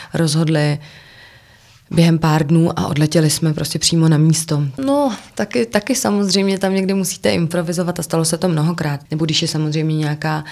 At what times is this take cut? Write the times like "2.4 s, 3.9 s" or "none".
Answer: 4.8 s, 9.1 s

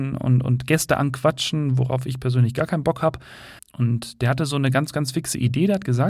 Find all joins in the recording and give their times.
3.6 s

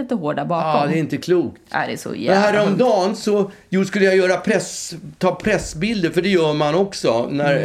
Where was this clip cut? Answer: none

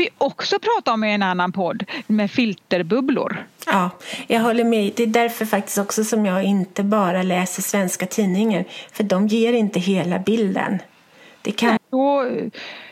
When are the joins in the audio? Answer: 3.7 s, 11.8 s

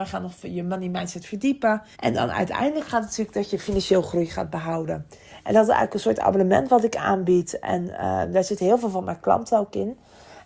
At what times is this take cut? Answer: 1.9 s

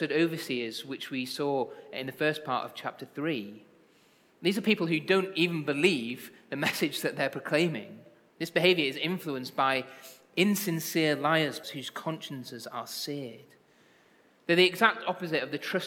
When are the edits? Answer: 8.3 s, 11.6 s

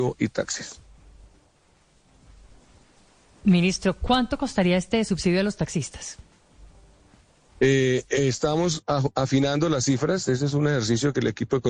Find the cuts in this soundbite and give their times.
none

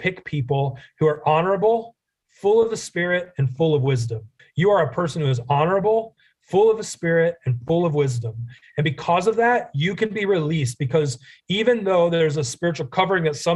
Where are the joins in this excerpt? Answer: 4.4 s

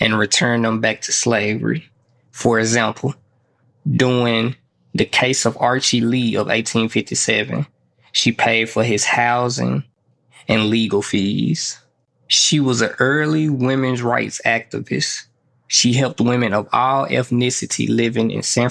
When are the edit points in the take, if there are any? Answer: none

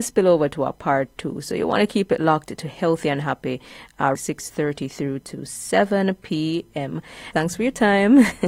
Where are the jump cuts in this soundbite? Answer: 4.1 s, 7.3 s

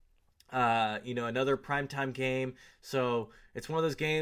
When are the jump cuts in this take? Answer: none

